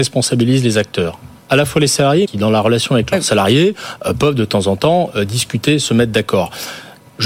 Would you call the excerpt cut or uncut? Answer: cut